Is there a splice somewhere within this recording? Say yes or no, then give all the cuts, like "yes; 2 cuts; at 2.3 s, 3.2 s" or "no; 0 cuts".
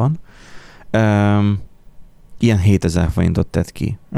no; 0 cuts